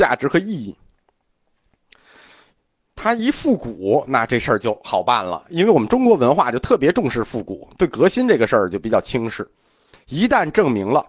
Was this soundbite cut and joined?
yes; 1 cut; at 9.9 s

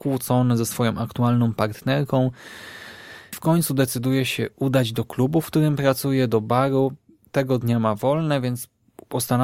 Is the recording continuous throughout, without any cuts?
no; 1 cut; at 3.3 s

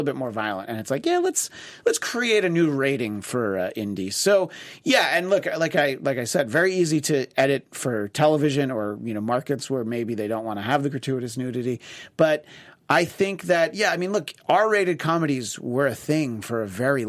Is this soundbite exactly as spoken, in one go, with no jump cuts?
yes; 0 cuts

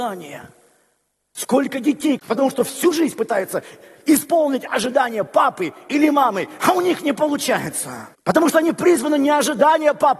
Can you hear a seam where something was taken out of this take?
yes; 2 cuts; at 2.2 s, 8.1 s

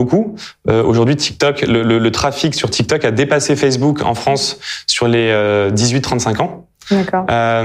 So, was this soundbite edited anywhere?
no; 0 cuts

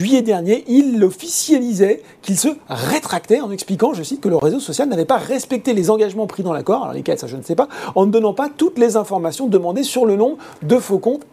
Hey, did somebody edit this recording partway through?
no; 0 cuts

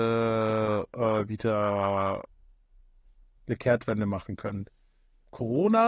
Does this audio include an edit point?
no; 0 cuts

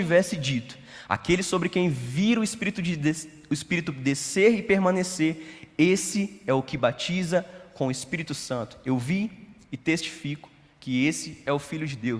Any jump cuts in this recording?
no; 0 cuts

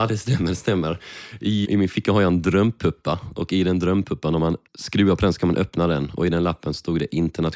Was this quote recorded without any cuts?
no; 2 cuts; at 1.6 s, 4.7 s

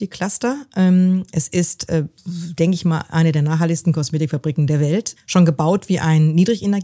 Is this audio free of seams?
no; 2 cuts; at 2.2 s, 5.2 s

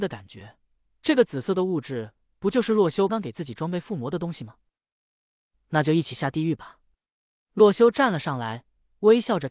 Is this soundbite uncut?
no; 1 cut; at 3.1 s

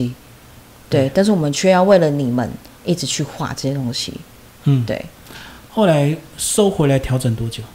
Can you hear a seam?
no; 0 cuts

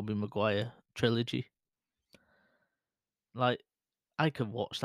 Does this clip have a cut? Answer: no; 0 cuts

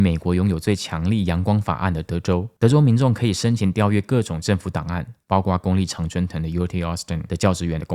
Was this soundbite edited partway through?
no; 0 cuts

